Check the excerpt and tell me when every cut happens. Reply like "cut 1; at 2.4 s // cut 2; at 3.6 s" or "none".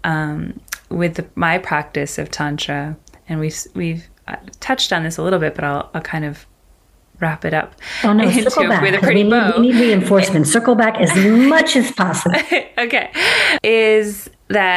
none